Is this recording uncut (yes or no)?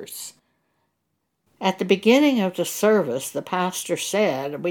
no